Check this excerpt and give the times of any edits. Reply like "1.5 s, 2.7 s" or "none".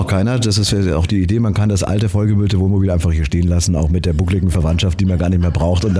none

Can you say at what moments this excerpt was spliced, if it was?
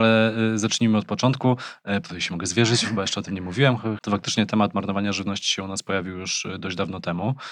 2.0 s, 4.0 s

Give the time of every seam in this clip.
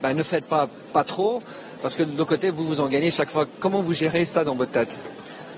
none

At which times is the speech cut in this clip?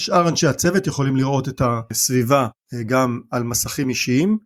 none

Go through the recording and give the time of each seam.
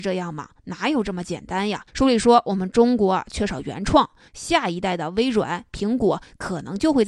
1.9 s, 4.3 s

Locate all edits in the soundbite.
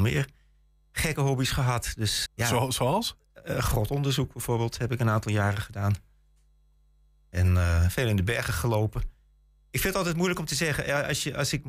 2.3 s

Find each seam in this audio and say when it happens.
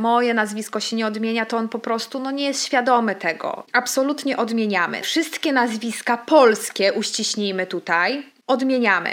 5.0 s

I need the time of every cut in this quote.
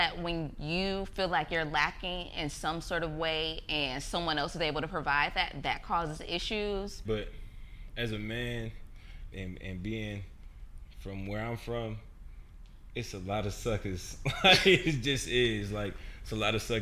7.0 s, 9.3 s

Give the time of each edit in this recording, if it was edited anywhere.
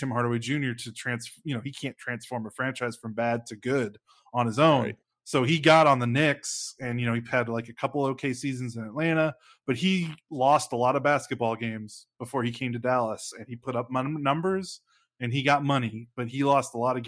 none

